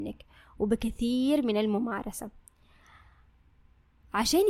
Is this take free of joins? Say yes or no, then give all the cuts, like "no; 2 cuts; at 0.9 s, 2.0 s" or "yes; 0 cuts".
yes; 0 cuts